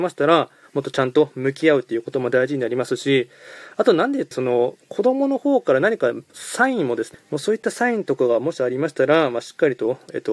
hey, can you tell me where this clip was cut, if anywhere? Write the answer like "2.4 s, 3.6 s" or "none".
4.3 s, 7.1 s